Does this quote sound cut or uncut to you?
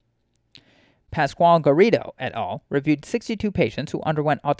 cut